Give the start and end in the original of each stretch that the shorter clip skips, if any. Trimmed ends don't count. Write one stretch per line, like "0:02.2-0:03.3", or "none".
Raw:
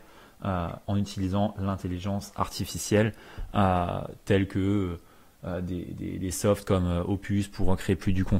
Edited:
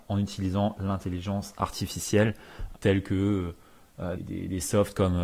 0:03.5-0:04.2
0:05.6-0:05.9

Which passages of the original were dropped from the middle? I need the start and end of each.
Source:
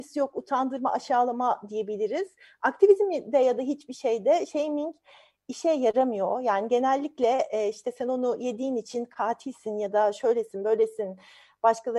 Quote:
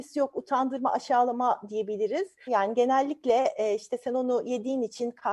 0:02.5-0:06.4

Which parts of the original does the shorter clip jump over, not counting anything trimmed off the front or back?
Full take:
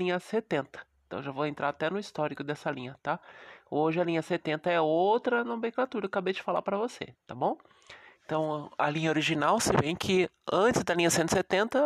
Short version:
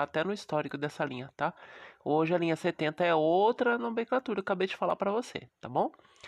none

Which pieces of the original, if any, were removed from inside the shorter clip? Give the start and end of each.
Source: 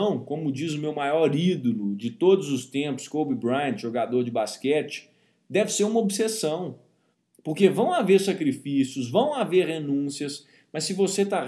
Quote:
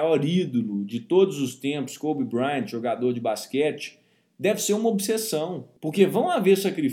0:06.9-0:07.4

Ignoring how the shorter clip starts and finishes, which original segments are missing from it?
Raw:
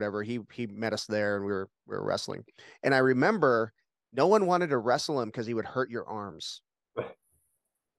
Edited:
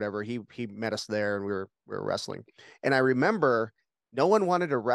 none

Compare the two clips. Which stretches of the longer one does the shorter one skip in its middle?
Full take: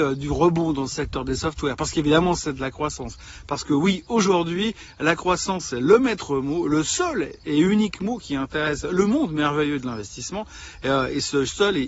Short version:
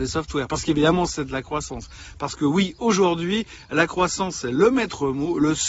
none

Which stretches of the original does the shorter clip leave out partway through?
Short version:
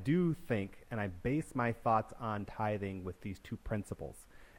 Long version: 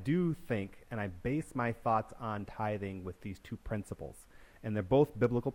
none

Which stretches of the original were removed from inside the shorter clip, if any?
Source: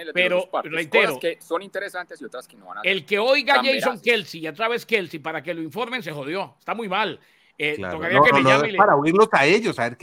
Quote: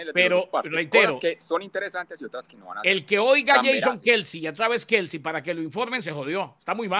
none

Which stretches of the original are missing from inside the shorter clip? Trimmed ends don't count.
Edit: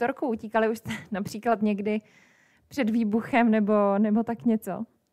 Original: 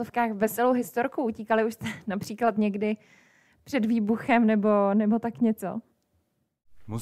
none

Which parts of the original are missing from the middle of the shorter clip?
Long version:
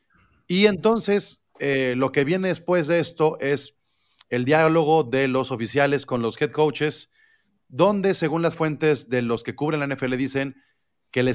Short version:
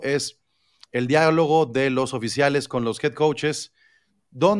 none

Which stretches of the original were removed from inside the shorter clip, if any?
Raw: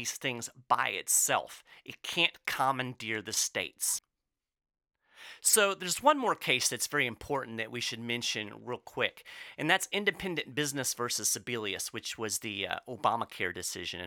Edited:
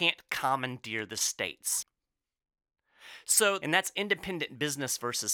0:05.8-0:09.6

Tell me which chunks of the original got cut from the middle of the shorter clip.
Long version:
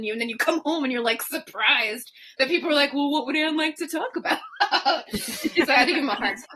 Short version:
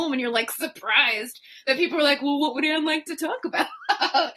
none

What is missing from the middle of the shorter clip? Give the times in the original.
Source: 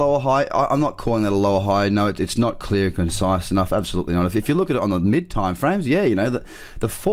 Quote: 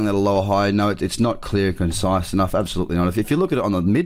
none

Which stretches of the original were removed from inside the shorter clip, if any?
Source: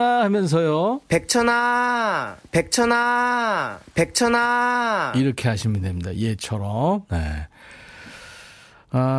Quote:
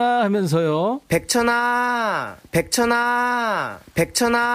none

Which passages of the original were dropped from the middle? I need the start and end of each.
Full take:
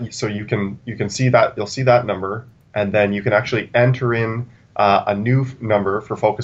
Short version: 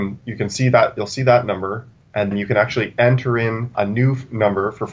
0:02.9-0:03.1
0:04.5-0:05.0

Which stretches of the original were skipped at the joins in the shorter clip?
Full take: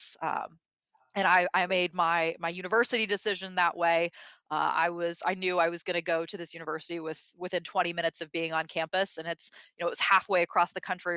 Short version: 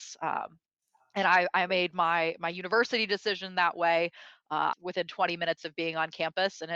0:04.7-0:07.3

